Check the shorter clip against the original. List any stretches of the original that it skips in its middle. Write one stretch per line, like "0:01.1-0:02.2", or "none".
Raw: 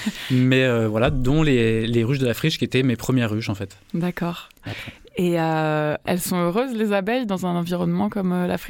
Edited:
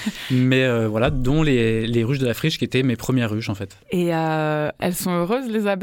0:03.8-0:05.1